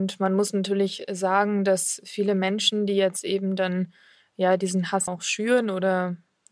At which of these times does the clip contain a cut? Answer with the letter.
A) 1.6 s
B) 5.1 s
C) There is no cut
B